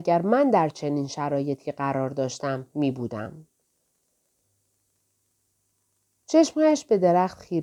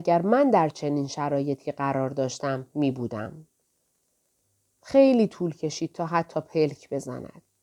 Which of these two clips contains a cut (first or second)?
second